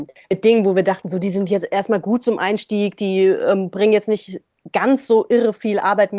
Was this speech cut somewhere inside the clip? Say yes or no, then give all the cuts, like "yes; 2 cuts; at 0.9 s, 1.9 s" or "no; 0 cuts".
no; 0 cuts